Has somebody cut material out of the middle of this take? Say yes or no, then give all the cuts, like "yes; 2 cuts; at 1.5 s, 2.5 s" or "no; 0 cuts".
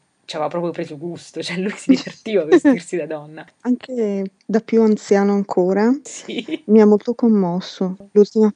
no; 0 cuts